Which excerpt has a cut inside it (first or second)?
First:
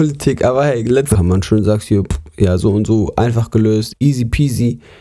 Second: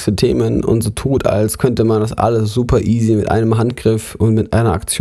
first